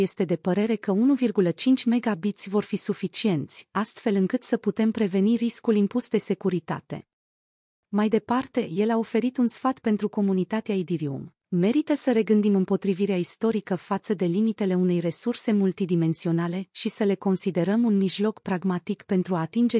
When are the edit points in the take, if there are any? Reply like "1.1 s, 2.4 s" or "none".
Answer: 11.4 s